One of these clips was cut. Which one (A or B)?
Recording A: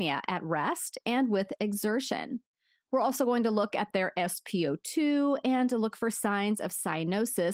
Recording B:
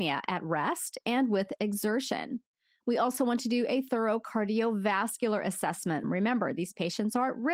B